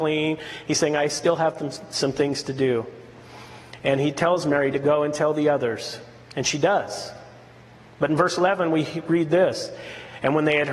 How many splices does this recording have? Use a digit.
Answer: 0